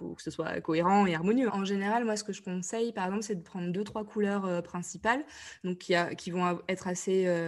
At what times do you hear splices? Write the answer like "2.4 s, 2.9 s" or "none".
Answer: 1.5 s